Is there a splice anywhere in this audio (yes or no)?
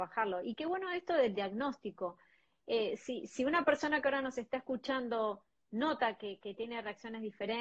no